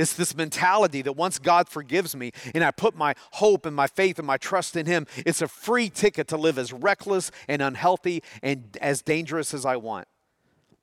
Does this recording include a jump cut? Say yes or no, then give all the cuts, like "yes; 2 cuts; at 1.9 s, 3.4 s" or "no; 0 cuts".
no; 0 cuts